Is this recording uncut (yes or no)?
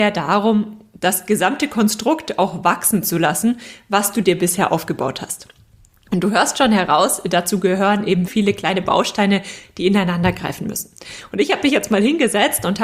no